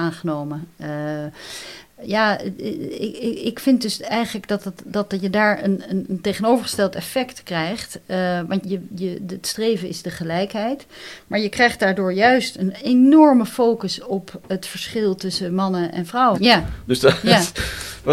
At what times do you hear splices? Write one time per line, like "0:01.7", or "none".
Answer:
0:08.6
0:16.3